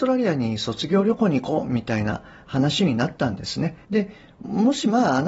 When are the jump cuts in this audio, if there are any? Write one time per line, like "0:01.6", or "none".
0:03.8

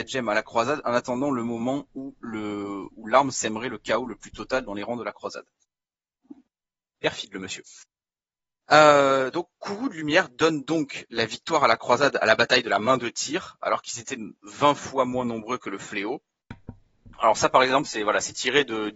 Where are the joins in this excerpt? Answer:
none

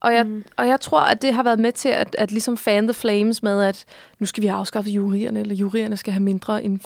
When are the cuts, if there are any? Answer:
none

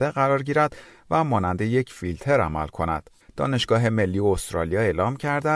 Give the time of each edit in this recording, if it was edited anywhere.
0:03.2

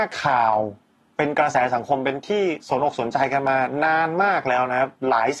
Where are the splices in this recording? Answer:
none

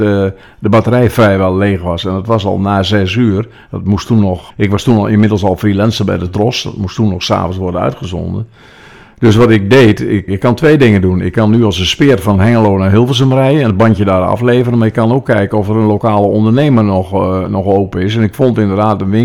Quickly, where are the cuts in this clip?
0:04.5
0:10.3

